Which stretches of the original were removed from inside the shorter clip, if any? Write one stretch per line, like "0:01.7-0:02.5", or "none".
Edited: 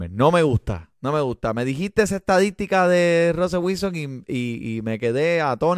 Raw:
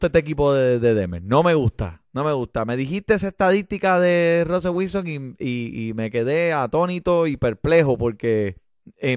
none